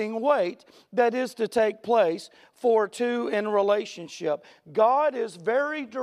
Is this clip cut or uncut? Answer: uncut